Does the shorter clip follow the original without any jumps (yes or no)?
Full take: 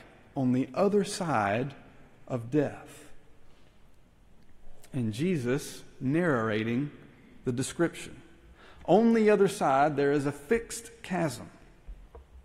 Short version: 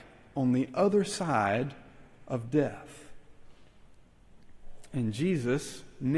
yes